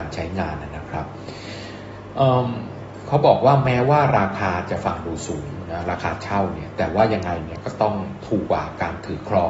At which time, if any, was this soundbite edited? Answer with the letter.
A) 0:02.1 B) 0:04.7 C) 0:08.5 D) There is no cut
C